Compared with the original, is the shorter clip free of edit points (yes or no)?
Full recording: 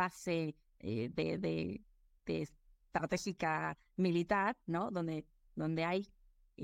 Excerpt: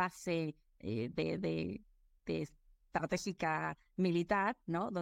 yes